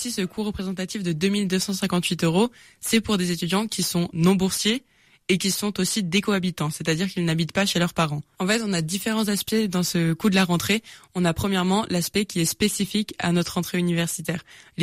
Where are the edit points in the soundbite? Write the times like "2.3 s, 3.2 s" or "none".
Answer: none